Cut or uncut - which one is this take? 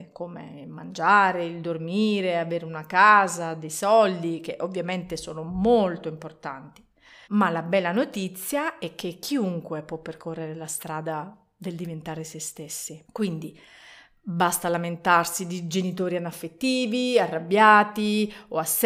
cut